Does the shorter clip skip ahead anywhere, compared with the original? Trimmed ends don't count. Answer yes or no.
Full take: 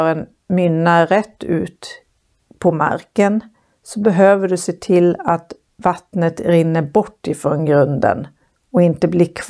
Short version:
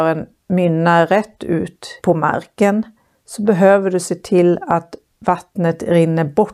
yes